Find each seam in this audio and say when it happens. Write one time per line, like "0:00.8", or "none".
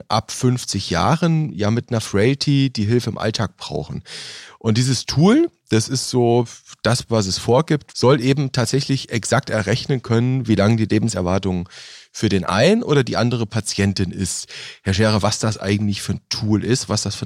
0:07.9
0:15.2